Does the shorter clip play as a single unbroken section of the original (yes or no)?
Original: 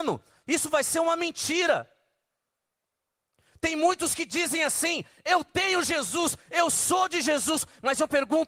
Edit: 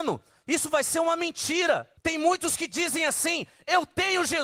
no